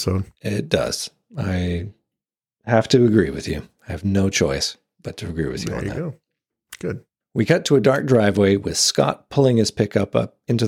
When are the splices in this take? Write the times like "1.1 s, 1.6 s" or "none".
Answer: none